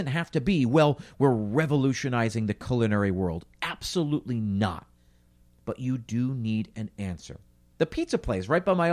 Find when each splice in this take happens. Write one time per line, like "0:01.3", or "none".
0:07.7